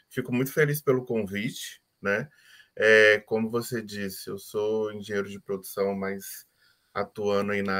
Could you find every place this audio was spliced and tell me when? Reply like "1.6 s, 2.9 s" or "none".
none